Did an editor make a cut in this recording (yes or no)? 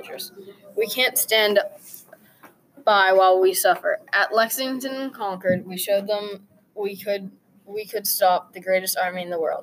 no